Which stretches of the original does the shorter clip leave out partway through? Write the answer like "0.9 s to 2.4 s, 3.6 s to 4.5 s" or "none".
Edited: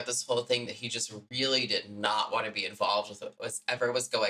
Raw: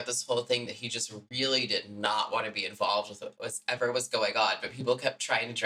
none